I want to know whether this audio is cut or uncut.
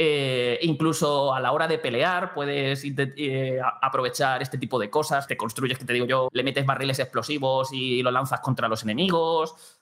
cut